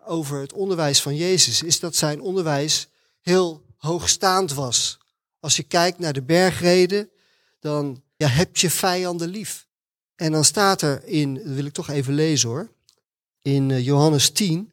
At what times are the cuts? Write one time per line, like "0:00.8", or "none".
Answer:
0:08.2
0:10.0